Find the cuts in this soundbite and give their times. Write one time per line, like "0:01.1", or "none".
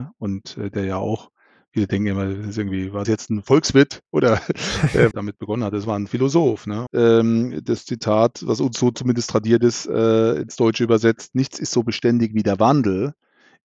0:03.0
0:05.1
0:06.9